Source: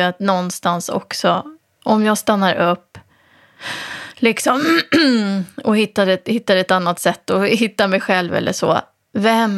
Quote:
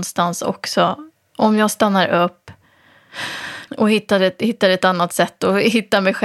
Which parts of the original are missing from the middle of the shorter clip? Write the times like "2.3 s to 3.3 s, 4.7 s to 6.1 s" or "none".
4.1 s to 5.5 s